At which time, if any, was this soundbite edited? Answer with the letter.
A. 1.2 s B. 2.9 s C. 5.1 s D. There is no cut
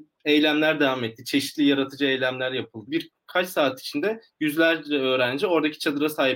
B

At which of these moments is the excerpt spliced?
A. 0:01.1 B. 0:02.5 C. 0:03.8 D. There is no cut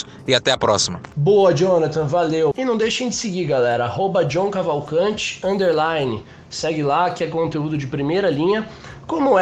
B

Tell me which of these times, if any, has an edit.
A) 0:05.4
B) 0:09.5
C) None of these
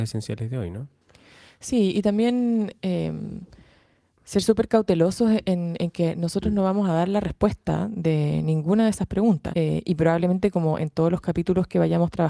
B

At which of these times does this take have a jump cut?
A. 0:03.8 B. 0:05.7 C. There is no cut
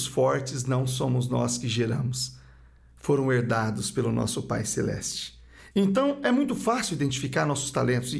B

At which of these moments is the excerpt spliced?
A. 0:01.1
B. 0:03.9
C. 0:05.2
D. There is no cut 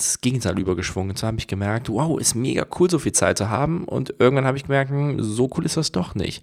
D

